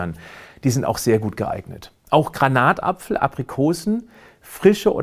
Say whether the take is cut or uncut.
uncut